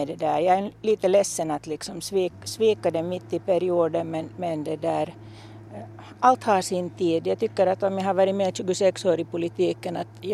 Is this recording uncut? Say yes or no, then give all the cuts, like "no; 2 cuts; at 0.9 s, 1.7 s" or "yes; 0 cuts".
yes; 0 cuts